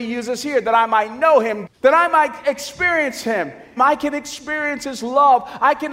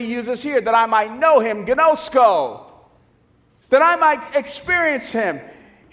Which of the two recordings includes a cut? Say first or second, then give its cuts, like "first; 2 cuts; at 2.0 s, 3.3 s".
first; 2 cuts; at 1.7 s, 3.8 s